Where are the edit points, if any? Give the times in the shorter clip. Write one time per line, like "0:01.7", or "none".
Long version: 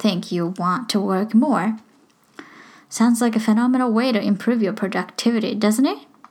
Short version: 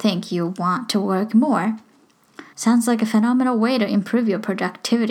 0:02.5